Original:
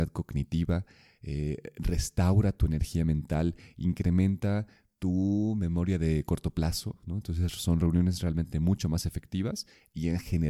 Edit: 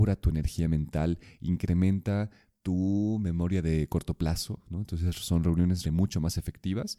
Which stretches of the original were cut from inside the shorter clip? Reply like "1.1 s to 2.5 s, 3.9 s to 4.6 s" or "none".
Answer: 8.2 s to 8.5 s